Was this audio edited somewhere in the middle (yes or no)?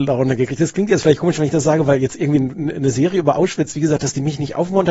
no